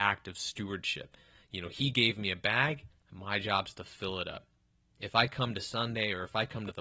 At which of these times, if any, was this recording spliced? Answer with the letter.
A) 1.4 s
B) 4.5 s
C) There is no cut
C